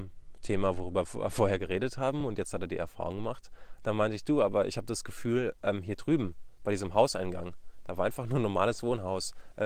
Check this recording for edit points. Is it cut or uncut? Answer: uncut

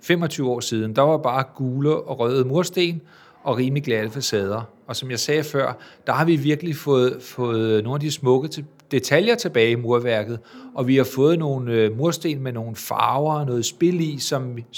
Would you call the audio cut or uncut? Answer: uncut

